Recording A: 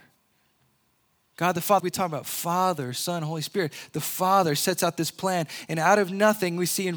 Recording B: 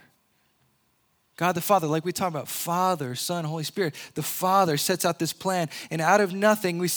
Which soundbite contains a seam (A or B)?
A